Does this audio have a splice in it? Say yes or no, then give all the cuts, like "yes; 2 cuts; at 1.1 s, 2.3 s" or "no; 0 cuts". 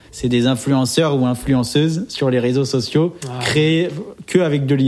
no; 0 cuts